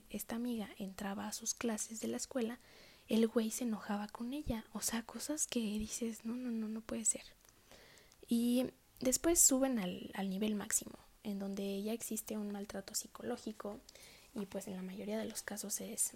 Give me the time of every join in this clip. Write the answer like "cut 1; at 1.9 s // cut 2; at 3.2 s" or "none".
none